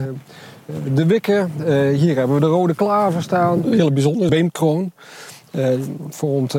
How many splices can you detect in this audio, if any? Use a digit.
1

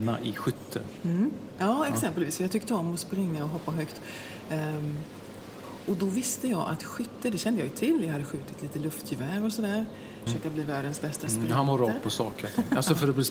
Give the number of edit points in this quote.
2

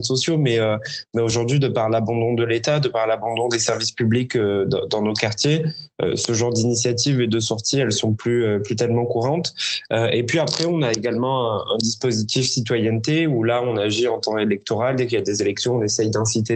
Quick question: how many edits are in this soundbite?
0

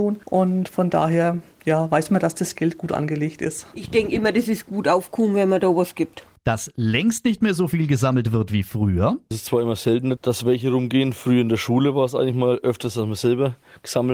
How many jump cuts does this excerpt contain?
1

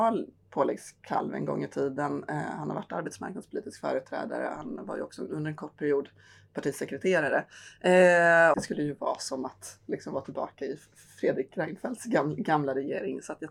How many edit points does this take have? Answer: 1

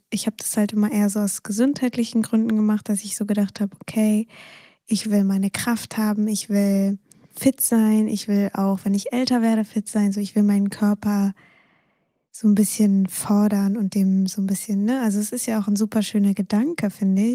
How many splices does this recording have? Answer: 0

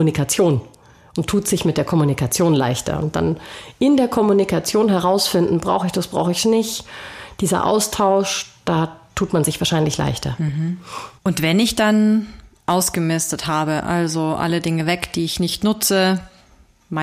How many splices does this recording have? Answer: 0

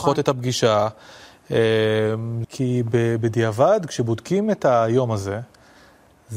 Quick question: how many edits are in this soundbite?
1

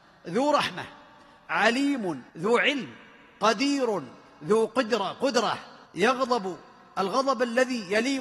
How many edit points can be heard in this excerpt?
2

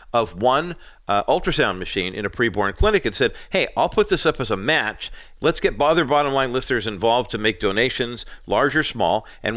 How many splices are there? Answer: 0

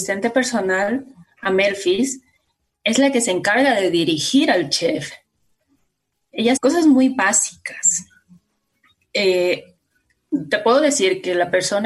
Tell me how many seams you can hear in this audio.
1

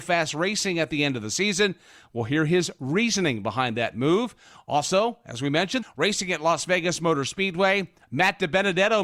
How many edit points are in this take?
2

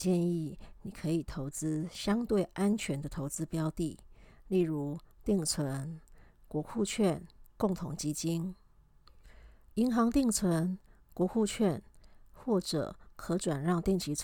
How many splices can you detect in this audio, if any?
1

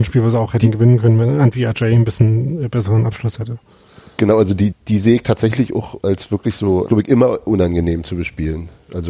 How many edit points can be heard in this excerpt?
2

